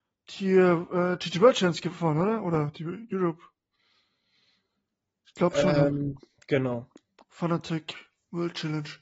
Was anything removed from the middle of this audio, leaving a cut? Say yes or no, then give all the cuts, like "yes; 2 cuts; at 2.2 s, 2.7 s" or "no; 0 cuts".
no; 0 cuts